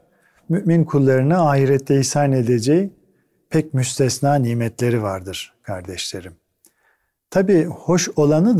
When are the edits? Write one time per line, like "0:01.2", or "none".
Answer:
none